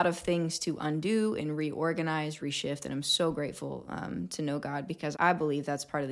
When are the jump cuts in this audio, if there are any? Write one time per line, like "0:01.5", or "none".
0:02.4
0:05.1